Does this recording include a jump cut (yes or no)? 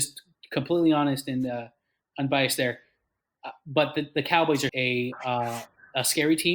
yes